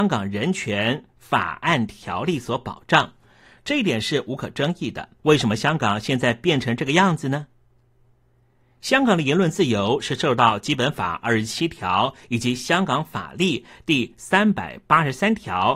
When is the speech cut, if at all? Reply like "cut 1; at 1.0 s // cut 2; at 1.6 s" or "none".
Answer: cut 1; at 5.2 s